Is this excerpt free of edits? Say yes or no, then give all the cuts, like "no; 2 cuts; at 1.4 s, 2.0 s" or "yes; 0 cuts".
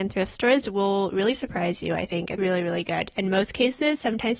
no; 1 cut; at 2.4 s